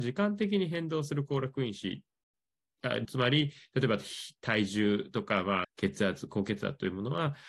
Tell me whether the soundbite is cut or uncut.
cut